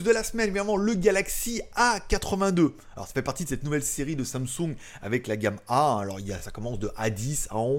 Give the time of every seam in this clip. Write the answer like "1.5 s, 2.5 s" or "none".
none